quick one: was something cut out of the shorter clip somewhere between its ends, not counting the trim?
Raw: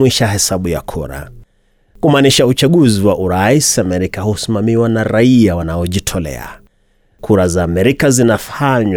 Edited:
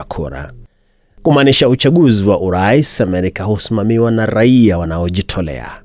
no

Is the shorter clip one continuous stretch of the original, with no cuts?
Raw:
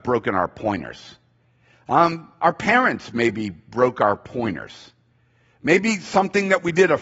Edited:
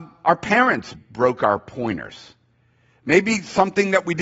no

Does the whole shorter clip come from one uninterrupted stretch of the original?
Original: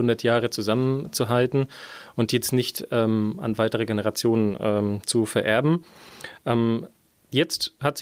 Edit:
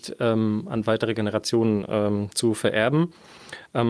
yes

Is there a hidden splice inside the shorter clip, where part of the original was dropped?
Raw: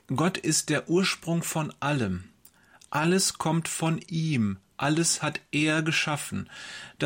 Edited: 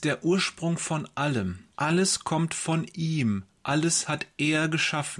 yes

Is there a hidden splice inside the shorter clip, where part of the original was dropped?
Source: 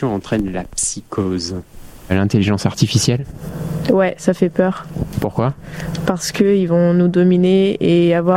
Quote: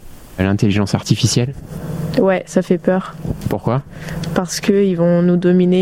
no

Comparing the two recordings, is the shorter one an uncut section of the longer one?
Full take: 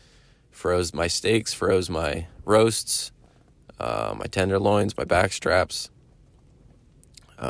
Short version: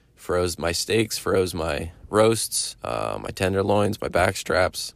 no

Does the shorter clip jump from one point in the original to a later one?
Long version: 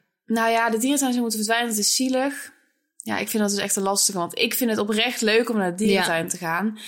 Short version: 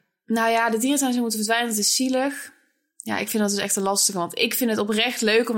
no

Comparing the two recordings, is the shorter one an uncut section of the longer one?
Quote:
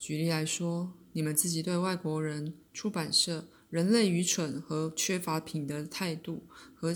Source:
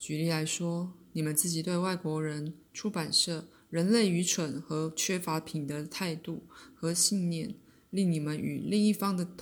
yes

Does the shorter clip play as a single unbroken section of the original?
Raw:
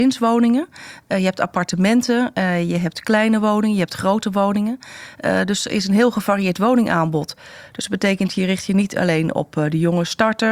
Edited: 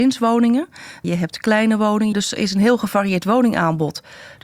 no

